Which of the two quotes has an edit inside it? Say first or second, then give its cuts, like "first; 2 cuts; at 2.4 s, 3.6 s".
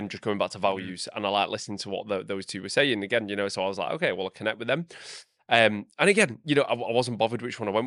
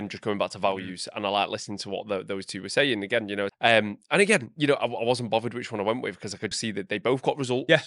second; 2 cuts; at 3.5 s, 6.5 s